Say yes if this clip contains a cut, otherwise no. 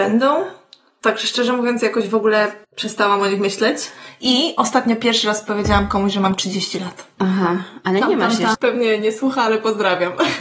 yes